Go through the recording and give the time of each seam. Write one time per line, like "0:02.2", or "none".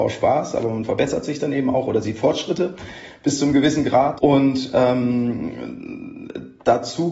0:04.2